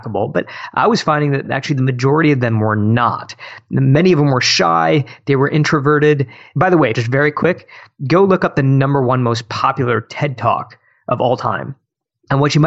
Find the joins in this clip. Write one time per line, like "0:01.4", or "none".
0:06.9